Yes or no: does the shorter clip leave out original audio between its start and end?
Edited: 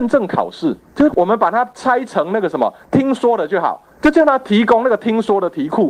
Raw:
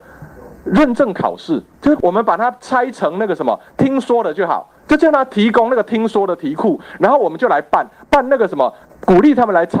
no